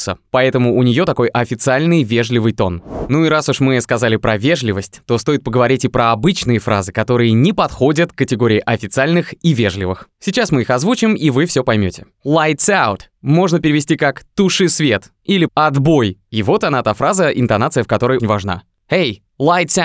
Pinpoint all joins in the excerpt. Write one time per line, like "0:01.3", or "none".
0:15.5
0:18.2